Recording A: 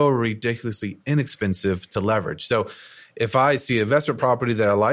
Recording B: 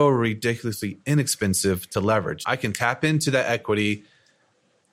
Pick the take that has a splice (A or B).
B